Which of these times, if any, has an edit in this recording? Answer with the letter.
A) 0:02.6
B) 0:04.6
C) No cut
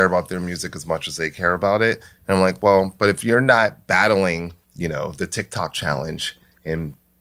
B